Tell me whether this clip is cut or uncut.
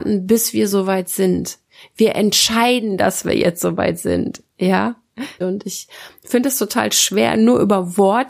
cut